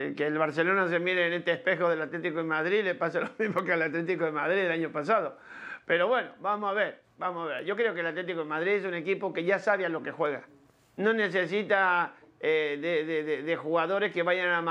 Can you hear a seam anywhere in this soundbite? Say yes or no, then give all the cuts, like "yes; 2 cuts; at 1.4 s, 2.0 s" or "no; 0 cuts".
no; 0 cuts